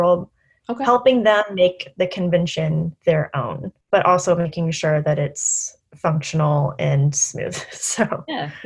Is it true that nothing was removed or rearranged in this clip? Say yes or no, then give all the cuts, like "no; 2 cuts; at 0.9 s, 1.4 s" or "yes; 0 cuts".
yes; 0 cuts